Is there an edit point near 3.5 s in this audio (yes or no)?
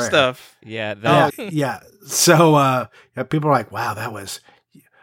no